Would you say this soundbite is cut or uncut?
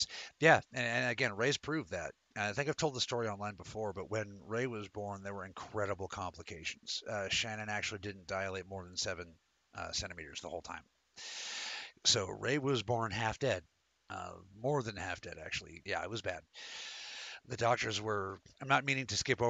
cut